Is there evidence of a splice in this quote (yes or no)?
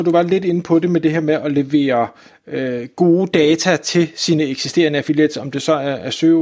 no